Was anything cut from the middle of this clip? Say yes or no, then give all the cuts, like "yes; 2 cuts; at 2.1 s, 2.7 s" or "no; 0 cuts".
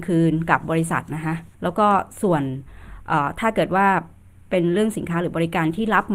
yes; 1 cut; at 1.5 s